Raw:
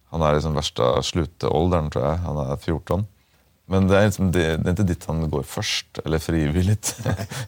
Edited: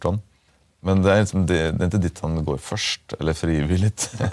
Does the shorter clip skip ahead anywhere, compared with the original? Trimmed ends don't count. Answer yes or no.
no